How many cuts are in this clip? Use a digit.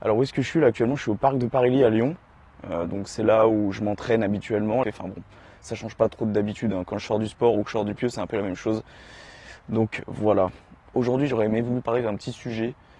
2